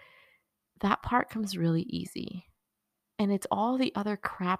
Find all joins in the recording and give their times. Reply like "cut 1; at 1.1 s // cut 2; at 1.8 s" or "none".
none